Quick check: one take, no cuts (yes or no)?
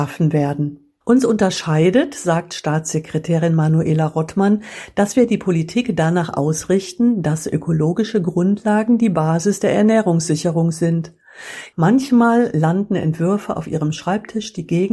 no